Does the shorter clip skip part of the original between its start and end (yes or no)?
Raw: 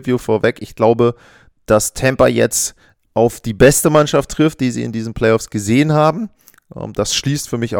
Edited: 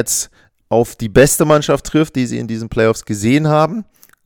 no